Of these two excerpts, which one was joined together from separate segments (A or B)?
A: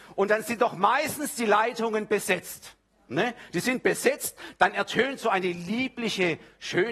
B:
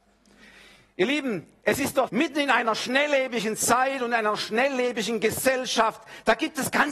B